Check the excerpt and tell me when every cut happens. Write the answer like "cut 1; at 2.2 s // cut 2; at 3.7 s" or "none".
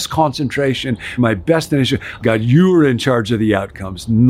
cut 1; at 1.2 s // cut 2; at 2.2 s